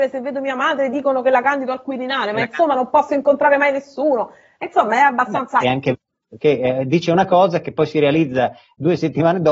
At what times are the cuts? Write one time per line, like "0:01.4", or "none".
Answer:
0:05.6